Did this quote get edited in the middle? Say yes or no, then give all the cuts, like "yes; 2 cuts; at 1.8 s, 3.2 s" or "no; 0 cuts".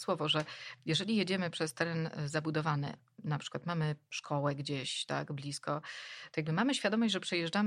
no; 0 cuts